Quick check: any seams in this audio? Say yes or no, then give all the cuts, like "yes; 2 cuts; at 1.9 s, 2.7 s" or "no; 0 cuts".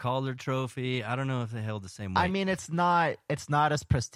no; 0 cuts